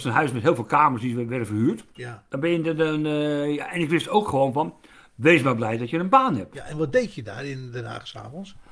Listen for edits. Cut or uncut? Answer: cut